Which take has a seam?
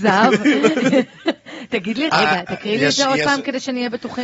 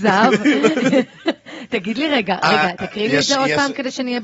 first; 1 cut; at 2.1 s

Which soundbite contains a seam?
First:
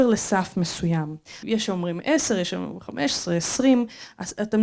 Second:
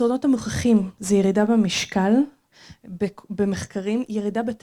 first; 1 cut; at 1.4 s

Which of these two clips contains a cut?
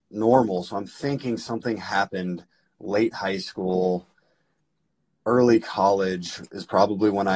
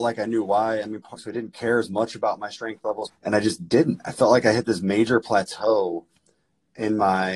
second; 2 cuts; at 1.2 s, 3.1 s

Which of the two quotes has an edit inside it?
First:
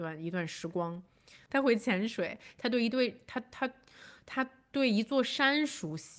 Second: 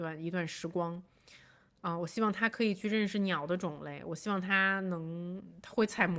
first; 1 cut; at 1.5 s

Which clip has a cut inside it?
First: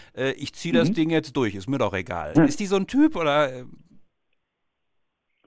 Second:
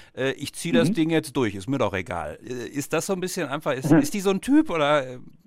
first; 1 cut; at 2.4 s

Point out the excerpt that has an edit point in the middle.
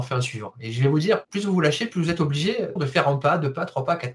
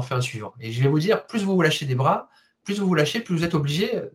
first; 2 cuts; at 1.2 s, 2.8 s

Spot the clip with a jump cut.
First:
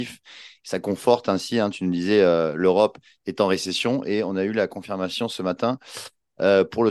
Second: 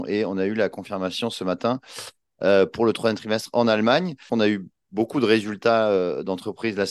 second; 1 cut; at 4.3 s

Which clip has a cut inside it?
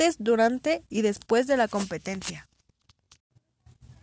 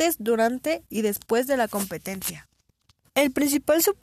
second; 1 cut; at 3.0 s

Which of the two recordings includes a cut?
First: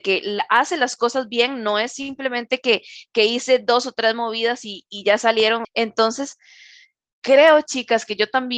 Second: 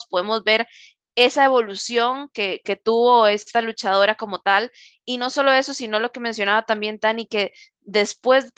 first; 1 cut; at 5.6 s

